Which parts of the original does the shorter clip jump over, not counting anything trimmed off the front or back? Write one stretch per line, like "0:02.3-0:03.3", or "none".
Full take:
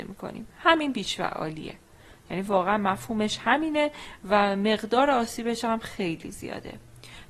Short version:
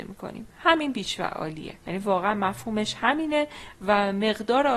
0:01.8-0:02.2